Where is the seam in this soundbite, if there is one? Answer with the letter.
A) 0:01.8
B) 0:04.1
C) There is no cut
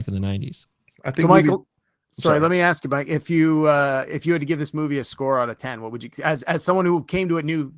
C